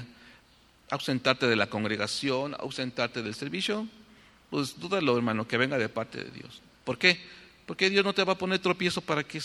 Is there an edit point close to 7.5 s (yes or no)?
no